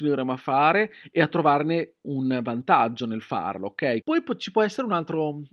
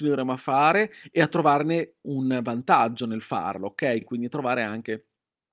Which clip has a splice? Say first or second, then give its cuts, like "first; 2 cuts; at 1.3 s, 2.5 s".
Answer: first; 1 cut; at 4.0 s